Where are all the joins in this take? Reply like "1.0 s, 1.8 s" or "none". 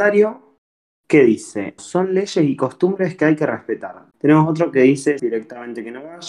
1.8 s, 4.1 s, 5.2 s